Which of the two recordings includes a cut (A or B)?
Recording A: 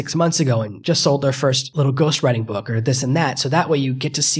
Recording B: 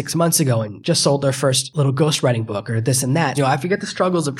B